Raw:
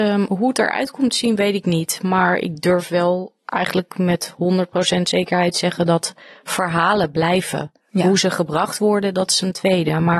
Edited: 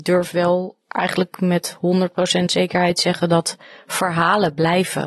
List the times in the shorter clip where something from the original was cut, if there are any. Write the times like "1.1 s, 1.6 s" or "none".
none